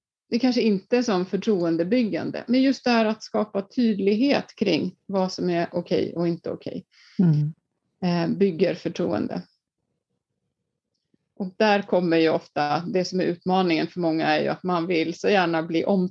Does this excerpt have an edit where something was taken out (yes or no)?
no